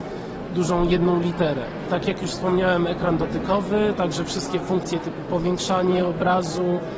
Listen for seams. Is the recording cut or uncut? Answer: cut